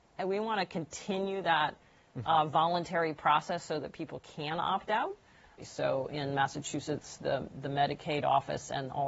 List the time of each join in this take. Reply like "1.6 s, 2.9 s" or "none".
5.6 s